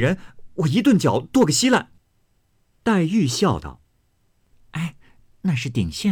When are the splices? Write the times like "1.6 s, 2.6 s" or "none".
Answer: none